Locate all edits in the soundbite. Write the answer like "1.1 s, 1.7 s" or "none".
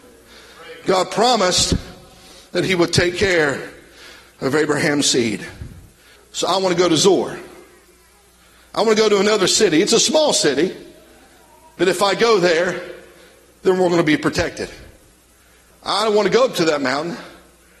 6.2 s, 15.7 s